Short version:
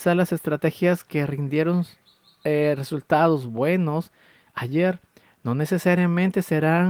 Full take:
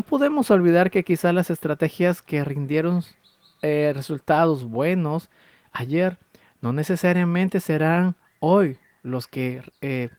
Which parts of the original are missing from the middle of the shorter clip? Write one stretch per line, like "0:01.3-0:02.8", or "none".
none